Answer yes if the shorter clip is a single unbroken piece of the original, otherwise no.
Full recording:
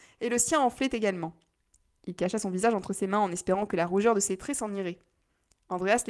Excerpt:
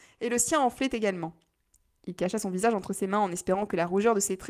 yes